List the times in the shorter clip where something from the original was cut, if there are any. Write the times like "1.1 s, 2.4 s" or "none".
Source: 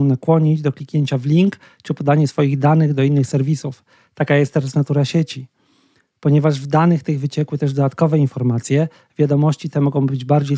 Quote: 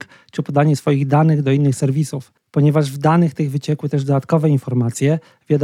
2.4 s